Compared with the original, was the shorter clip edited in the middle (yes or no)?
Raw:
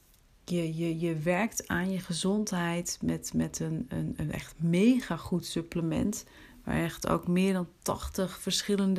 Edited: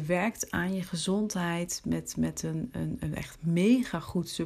no